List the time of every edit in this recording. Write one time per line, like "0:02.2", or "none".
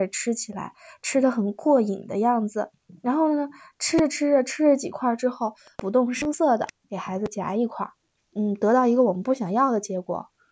0:08.2

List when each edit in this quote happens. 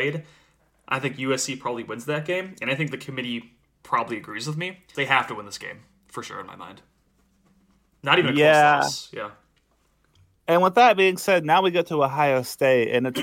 0:04.9

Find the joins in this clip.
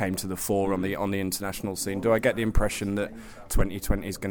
none

